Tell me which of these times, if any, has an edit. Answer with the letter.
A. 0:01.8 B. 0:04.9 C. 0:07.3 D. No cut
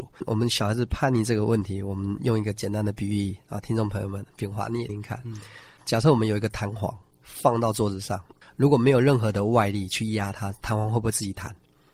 B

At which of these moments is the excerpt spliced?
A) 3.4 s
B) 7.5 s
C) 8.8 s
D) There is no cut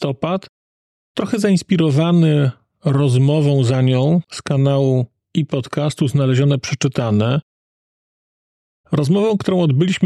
D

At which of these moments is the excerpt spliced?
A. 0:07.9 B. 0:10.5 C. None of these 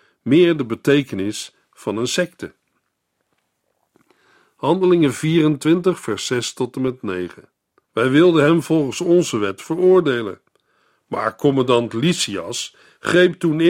A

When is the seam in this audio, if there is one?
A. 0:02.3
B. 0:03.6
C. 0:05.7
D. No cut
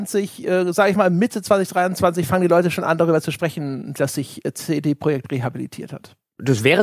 D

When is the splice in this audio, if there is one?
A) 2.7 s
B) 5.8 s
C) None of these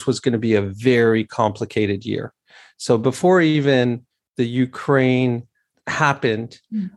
C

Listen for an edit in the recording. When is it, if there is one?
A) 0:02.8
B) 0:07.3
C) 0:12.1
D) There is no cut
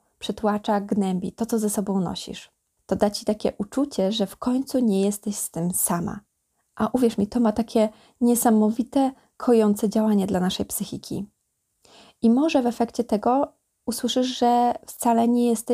A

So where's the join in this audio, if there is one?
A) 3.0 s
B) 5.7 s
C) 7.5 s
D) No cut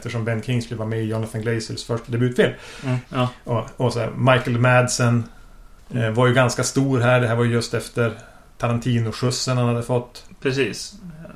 A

